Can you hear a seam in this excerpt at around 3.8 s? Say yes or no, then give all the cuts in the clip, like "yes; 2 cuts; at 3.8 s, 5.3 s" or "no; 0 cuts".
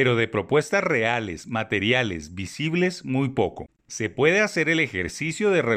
yes; 1 cut; at 3.8 s